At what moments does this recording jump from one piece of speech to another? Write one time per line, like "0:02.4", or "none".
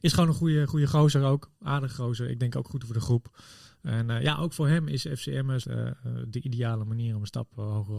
0:05.6

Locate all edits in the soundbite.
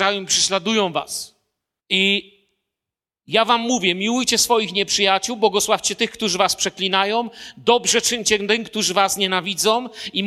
0:01.8

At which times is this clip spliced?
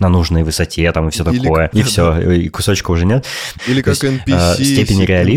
0:01.7
0:03.6

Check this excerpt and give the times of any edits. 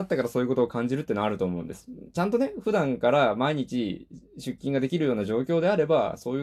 none

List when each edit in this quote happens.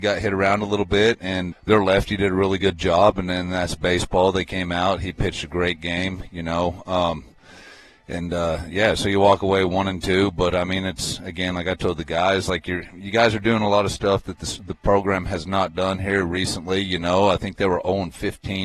0:01.5

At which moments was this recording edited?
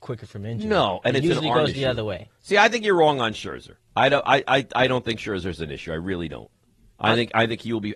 none

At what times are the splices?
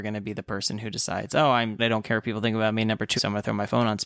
0:01.8
0:03.2

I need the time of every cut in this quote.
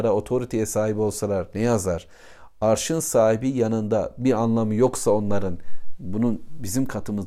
none

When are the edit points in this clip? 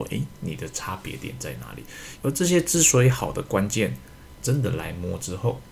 0:02.2
0:04.4

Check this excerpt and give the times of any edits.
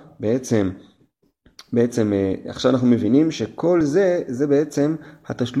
none

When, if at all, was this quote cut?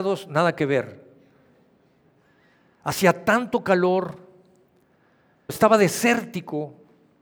0:05.5

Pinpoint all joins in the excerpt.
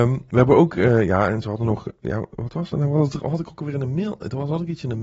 none

